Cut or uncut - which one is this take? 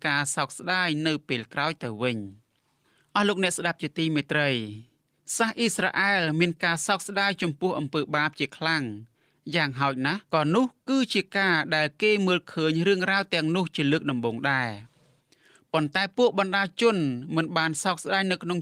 cut